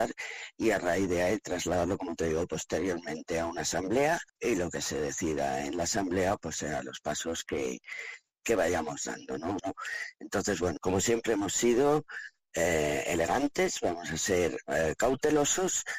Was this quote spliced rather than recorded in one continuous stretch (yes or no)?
yes